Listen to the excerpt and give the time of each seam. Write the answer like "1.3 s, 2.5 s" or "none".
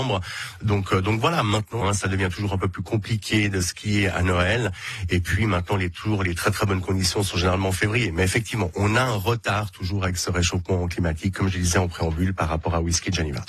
1.8 s